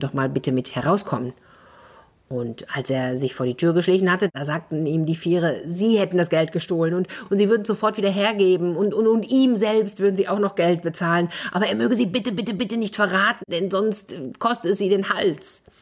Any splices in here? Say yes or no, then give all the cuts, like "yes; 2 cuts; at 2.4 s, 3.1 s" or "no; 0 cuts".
no; 0 cuts